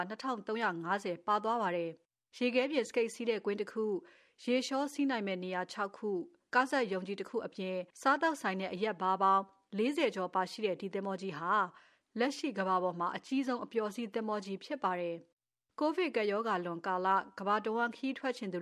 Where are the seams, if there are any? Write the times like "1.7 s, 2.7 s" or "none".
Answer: 7.9 s